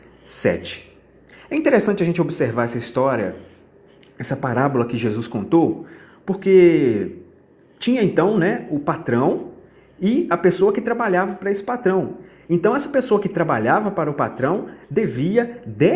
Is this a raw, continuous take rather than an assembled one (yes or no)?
yes